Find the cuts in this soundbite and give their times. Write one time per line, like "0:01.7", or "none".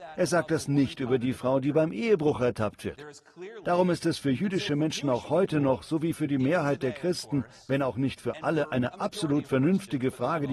none